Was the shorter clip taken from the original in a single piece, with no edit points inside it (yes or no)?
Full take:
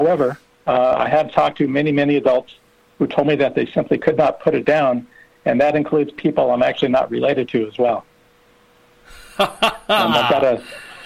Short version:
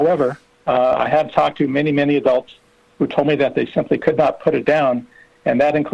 yes